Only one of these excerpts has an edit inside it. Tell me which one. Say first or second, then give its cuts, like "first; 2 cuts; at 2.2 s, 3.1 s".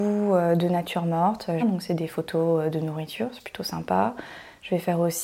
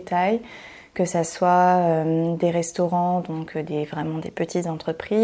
first; 1 cut; at 1.6 s